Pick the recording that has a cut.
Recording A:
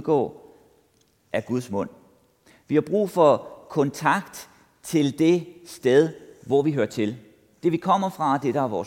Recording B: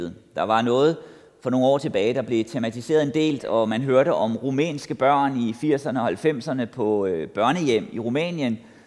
B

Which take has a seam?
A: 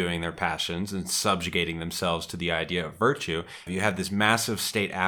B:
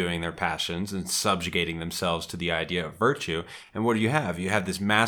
A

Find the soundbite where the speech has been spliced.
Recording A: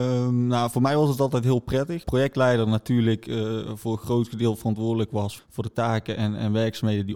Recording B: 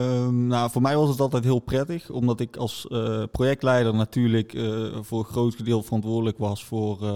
A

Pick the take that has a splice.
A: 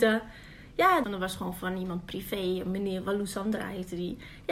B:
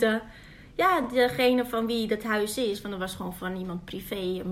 A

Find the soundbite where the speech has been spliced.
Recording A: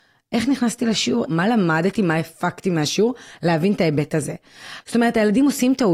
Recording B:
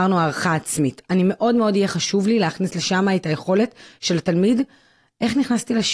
A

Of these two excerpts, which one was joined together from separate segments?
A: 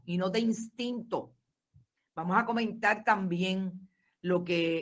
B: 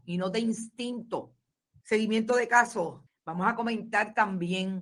B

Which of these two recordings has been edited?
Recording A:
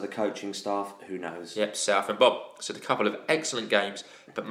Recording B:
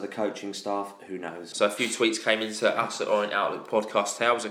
B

